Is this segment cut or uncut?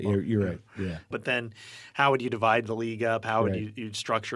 cut